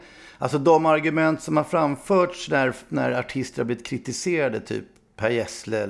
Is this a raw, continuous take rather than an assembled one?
yes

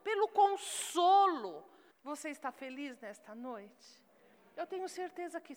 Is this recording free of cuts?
no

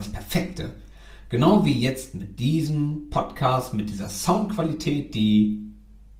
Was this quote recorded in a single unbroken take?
yes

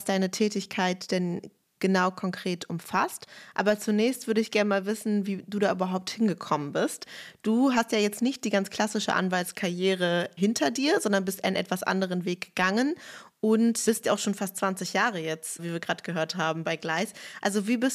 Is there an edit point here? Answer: no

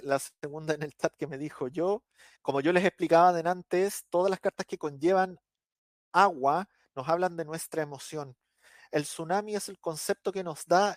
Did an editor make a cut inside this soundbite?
yes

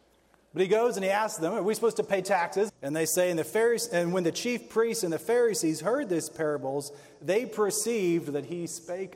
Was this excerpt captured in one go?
no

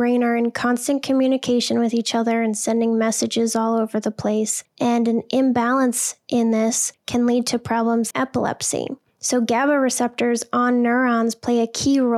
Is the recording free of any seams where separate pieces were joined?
no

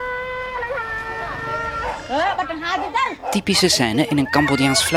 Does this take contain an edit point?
no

